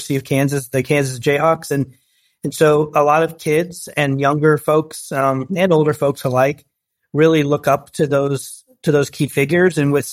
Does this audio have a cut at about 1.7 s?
no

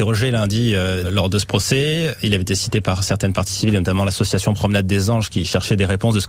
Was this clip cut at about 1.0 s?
yes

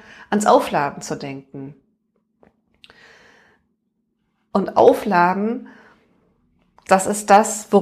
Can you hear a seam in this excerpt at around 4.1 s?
no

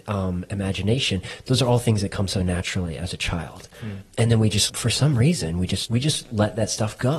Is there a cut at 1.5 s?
no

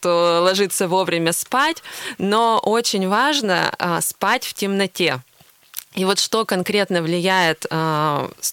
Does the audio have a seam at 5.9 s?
no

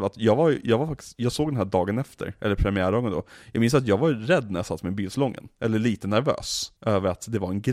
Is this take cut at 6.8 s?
yes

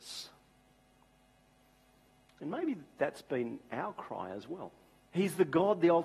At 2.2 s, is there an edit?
no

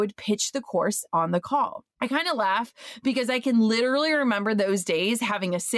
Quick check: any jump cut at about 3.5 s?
no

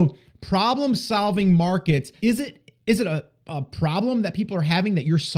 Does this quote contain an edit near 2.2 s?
yes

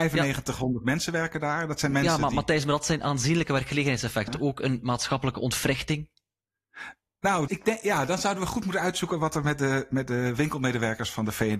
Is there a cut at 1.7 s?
no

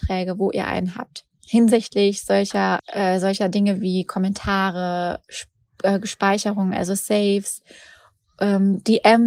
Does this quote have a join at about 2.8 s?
yes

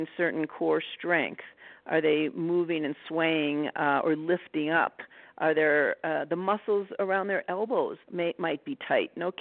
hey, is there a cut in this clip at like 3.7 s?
no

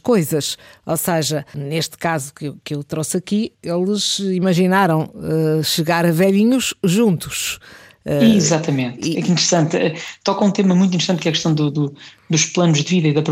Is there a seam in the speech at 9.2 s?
no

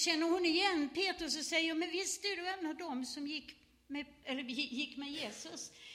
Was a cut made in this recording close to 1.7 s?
no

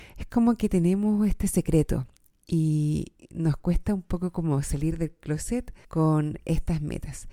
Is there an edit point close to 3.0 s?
no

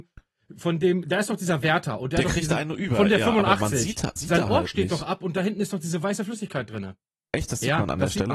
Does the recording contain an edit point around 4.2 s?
yes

